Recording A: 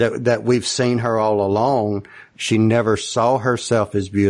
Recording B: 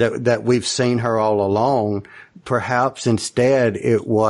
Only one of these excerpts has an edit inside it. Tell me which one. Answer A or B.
A